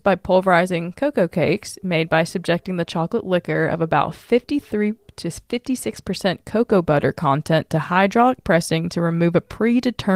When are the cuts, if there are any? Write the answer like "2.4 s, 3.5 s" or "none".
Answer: none